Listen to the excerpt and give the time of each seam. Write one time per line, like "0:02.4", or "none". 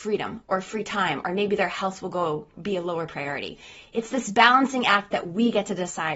0:02.5